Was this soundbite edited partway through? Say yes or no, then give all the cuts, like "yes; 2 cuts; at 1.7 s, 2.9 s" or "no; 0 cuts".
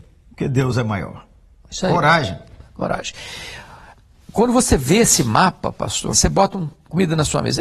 yes; 1 cut; at 6.1 s